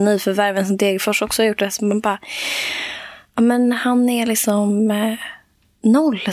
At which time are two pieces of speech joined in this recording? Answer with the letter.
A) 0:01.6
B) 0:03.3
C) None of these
C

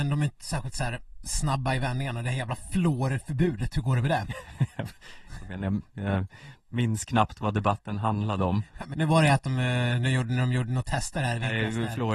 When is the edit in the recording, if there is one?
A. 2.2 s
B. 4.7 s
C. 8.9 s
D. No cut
C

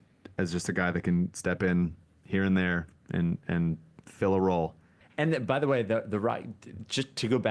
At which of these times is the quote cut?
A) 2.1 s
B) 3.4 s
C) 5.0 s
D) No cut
C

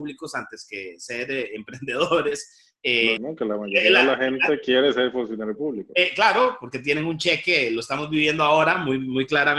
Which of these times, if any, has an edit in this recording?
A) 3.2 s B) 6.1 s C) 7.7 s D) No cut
A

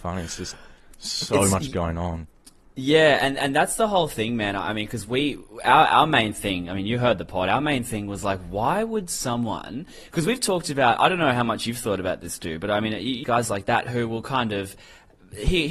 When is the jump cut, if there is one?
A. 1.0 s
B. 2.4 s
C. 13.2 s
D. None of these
C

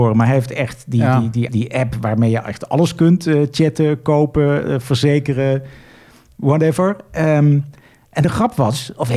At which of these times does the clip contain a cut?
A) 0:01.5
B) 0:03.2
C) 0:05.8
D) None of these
A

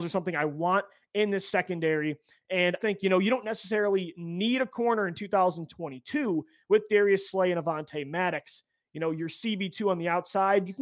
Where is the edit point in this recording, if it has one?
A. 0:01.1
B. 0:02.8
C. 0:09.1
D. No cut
B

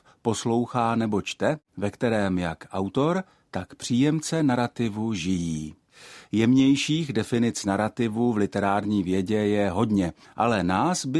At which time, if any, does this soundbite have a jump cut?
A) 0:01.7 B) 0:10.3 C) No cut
A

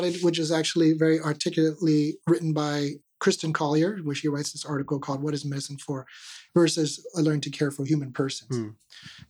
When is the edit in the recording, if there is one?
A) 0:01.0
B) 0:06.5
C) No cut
B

